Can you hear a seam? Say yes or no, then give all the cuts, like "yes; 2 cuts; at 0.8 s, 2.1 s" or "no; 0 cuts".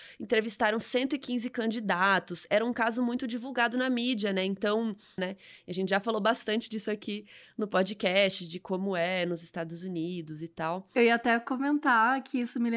yes; 1 cut; at 5.2 s